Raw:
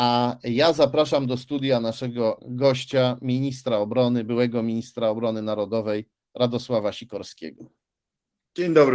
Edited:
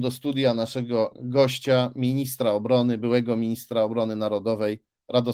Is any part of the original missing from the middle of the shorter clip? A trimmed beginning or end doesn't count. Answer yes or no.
no